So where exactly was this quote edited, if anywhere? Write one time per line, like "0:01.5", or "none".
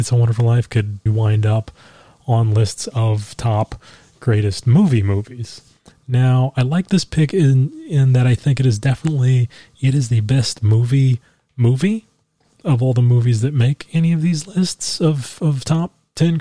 0:01.1
0:05.9